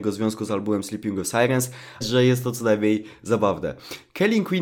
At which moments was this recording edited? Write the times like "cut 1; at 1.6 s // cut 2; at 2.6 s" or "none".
cut 1; at 2.0 s